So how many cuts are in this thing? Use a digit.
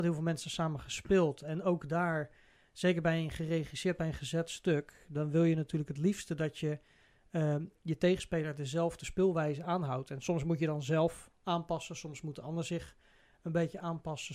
1